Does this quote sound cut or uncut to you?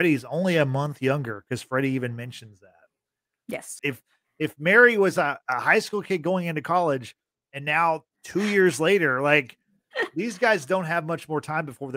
cut